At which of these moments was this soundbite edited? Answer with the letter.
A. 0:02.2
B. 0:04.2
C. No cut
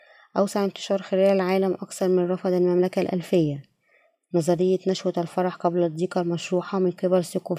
C